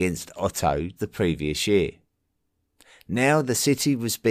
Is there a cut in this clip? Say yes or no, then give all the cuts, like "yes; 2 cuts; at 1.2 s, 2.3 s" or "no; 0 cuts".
yes; 1 cut; at 1.0 s